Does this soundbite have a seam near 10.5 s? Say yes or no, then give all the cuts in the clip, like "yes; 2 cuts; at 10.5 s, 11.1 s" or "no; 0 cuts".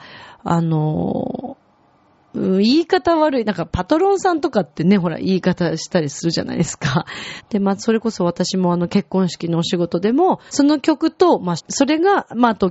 yes; 3 cuts; at 7.4 s, 10.5 s, 11.6 s